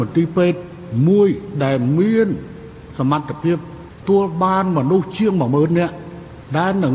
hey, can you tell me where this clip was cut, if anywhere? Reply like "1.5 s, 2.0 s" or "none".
4.0 s